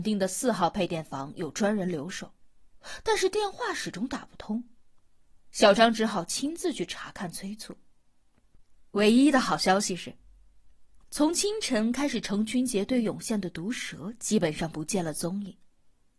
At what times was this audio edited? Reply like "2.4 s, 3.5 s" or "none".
11.0 s